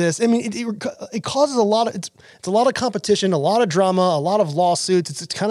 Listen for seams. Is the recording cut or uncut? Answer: uncut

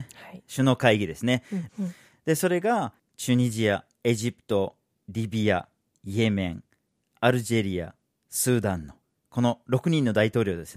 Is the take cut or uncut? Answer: cut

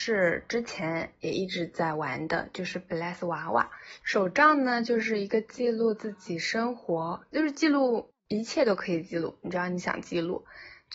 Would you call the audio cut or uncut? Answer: cut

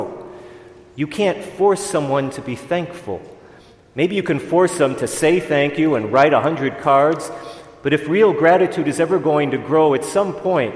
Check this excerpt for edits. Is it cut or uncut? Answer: uncut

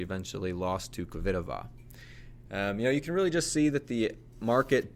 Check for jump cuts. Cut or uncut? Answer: cut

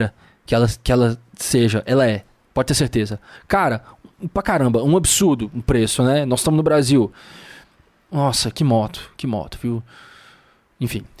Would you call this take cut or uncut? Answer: cut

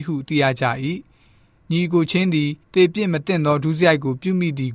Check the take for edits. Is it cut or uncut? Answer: cut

